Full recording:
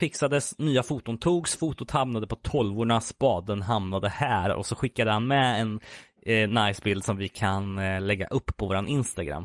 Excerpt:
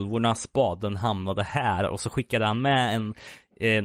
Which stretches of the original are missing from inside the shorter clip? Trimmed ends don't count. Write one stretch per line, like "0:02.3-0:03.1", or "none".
none